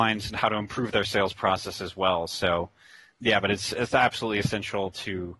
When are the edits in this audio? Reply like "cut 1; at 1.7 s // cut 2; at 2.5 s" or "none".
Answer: cut 1; at 3.1 s